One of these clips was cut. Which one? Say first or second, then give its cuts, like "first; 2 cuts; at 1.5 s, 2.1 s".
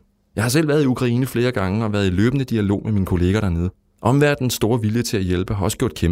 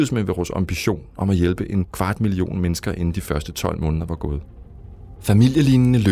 second; 1 cut; at 5.2 s